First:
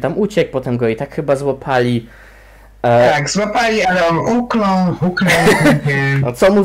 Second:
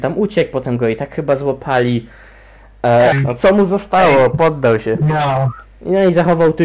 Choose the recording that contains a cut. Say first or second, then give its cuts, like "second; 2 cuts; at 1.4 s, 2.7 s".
second; 1 cut; at 3.1 s